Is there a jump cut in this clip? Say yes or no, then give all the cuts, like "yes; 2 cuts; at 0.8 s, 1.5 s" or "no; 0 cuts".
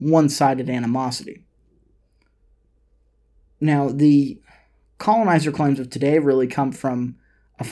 no; 0 cuts